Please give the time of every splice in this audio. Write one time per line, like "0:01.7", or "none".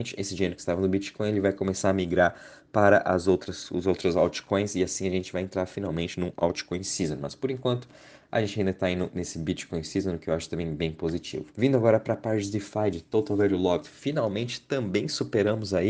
0:11.5